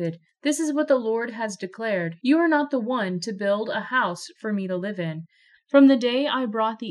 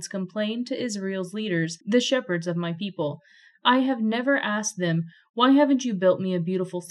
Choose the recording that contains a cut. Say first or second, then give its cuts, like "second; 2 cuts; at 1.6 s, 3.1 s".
first; 1 cut; at 5.5 s